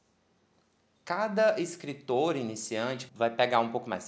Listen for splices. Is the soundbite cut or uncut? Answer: cut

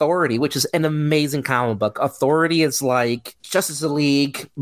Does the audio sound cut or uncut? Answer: cut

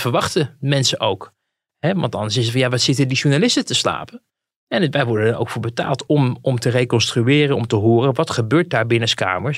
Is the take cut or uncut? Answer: uncut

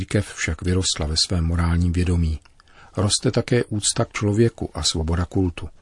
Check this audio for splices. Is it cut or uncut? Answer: uncut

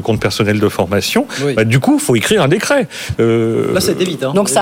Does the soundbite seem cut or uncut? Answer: cut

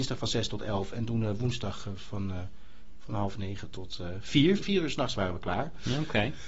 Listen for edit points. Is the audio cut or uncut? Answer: cut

